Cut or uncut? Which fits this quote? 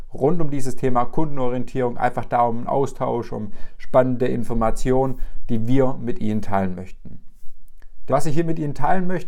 cut